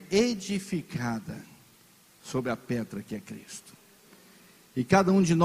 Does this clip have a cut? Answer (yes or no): no